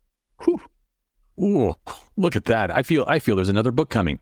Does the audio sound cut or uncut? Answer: uncut